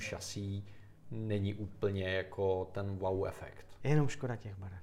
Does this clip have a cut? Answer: yes; 1 cut; at 3.8 s

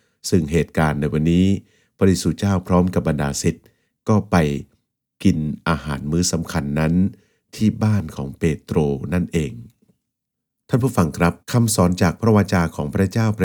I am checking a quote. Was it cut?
yes; 1 cut; at 11.4 s

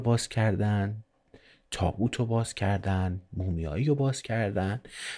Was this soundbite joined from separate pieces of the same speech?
no; 0 cuts

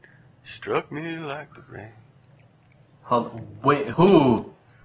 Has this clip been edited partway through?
yes; 1 cut; at 3.9 s

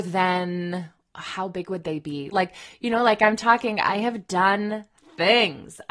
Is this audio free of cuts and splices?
no; 1 cut; at 2.3 s

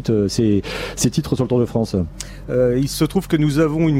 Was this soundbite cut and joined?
yes; 1 cut; at 2.4 s

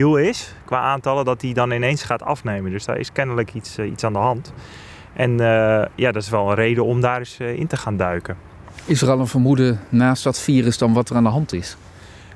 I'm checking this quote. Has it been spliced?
no; 0 cuts

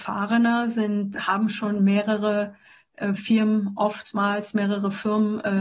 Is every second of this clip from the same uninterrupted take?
no; 1 cut; at 1.1 s

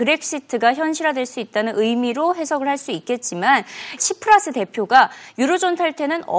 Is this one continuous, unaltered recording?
no; 1 cut; at 4.0 s

